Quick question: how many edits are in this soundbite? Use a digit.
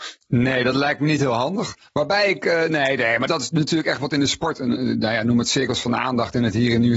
1